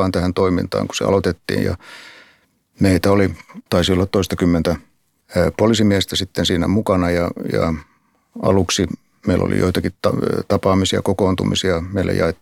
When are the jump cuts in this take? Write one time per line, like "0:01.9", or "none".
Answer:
0:03.7